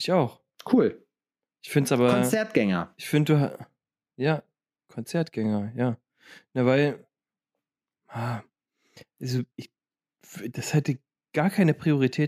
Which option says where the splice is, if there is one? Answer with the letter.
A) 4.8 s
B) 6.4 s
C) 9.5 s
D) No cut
C